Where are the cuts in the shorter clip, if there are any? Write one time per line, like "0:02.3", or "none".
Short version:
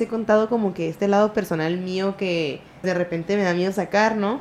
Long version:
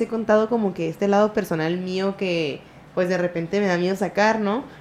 0:02.8